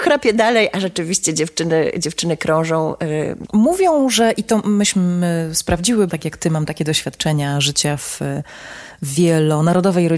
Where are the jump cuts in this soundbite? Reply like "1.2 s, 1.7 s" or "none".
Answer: 3.5 s, 6.1 s